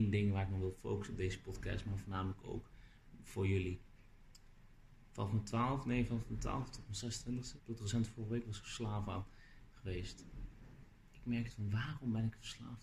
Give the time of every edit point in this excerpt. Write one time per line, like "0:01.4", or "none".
0:07.6